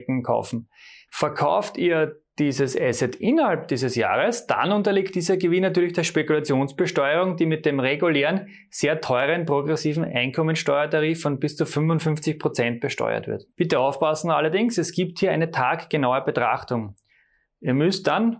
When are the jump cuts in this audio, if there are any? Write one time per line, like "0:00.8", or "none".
0:01.1
0:13.5